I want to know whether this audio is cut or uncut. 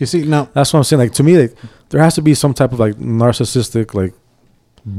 uncut